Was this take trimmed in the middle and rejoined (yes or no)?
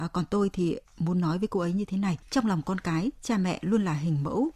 yes